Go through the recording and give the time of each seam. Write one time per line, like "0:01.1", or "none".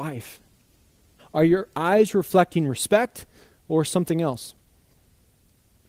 0:01.2